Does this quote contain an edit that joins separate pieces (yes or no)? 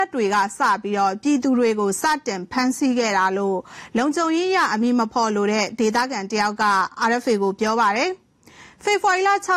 no